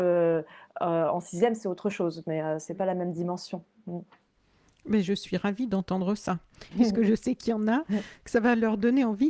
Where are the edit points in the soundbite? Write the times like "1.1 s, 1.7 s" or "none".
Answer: 6.7 s